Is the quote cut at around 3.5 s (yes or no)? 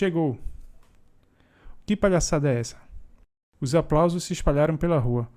no